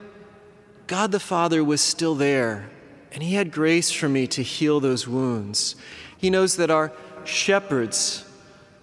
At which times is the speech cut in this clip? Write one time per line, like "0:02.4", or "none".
0:06.1